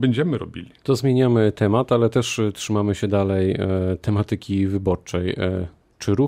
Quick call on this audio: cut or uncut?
uncut